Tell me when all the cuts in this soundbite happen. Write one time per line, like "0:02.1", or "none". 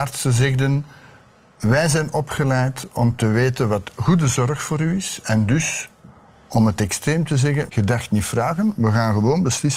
0:07.7